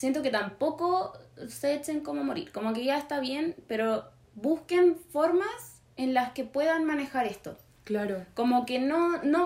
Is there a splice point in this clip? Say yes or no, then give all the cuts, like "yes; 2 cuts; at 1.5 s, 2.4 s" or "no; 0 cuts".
no; 0 cuts